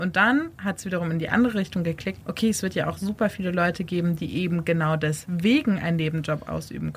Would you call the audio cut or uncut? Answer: cut